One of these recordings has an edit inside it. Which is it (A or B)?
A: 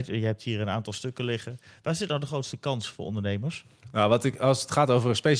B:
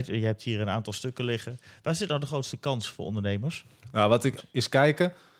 B